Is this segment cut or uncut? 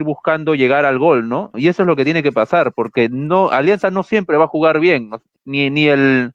cut